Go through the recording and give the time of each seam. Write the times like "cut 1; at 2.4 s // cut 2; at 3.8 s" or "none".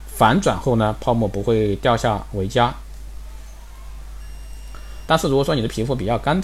cut 1; at 5.1 s